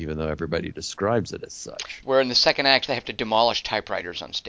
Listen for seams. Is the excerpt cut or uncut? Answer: cut